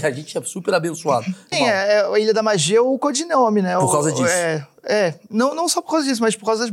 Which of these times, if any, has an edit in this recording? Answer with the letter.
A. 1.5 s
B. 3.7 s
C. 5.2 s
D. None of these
A